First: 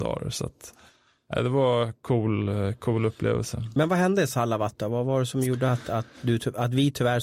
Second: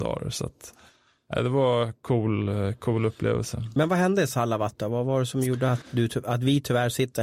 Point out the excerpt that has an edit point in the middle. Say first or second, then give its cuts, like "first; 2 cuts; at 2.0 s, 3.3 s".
second; 1 cut; at 5.8 s